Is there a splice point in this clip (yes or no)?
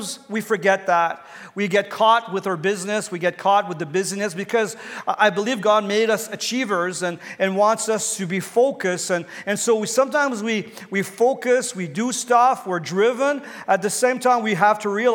no